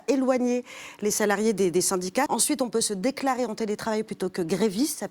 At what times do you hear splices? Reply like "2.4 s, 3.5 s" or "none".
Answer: 2.3 s